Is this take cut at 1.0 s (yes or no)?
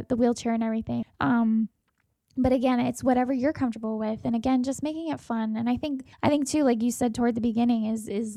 yes